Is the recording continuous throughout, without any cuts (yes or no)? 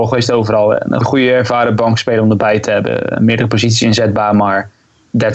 no